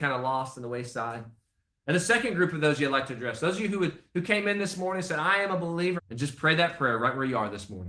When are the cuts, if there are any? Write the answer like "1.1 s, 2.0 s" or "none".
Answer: 6.0 s